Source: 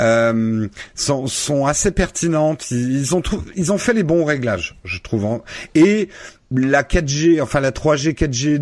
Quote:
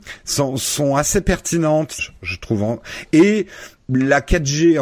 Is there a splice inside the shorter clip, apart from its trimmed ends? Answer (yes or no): yes